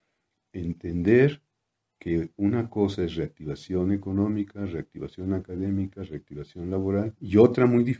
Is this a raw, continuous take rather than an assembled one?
yes; 0 cuts

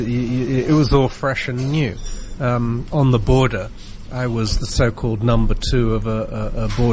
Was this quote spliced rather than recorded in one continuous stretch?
yes; 1 cut; at 2.4 s

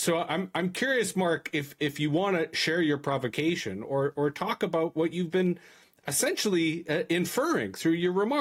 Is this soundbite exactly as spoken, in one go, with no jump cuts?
yes; 0 cuts

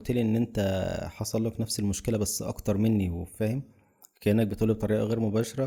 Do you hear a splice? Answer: no; 0 cuts

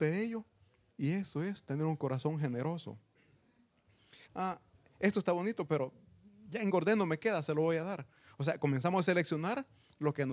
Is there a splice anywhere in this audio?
yes; 1 cut; at 4.2 s

